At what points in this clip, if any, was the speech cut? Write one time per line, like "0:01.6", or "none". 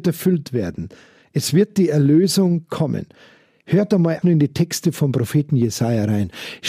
0:04.2